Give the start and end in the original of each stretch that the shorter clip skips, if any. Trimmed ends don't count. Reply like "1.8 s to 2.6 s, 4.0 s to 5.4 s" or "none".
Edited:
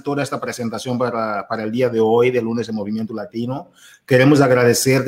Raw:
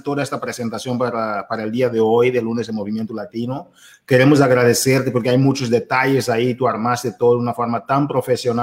none

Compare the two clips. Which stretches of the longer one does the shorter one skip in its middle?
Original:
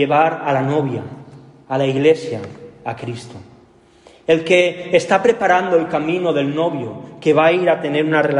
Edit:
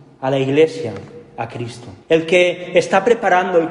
3.5 s to 4.2 s

